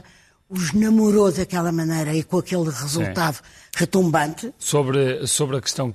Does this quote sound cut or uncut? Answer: cut